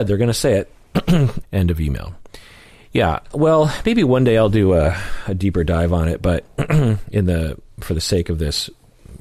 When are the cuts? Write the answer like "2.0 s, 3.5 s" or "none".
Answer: 1.4 s